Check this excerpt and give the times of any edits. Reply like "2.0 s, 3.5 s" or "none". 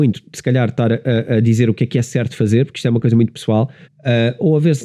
3.8 s